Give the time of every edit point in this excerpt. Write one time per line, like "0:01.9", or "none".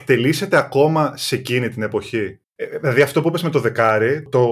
0:02.4